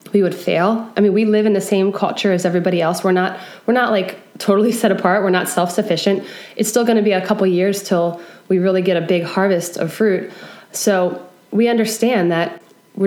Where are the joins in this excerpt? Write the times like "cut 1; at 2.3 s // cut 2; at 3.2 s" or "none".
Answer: none

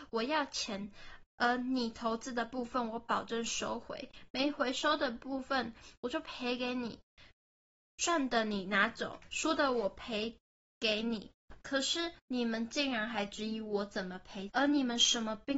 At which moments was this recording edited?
cut 1; at 14.5 s

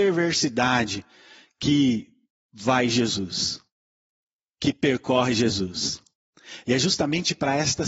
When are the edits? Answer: cut 1; at 6.6 s

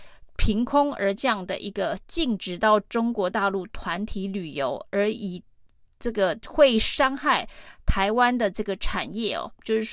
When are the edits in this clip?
none

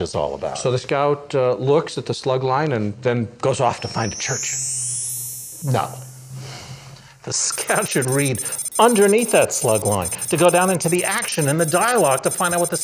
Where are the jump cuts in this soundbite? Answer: none

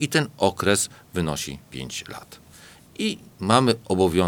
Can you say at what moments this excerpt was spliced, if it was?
none

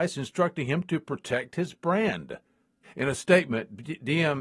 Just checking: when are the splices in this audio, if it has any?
cut 1; at 2.8 s

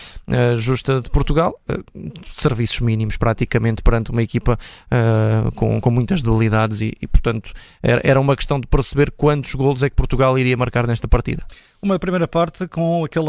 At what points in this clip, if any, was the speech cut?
none

